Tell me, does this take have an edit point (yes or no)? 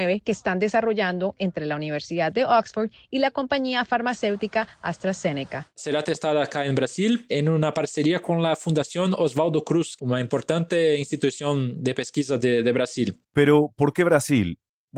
yes